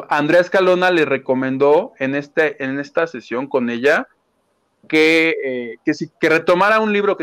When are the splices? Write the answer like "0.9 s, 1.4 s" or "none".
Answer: 6.1 s